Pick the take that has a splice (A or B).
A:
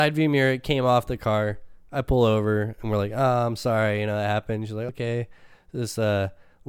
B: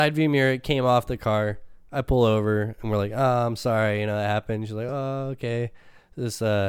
A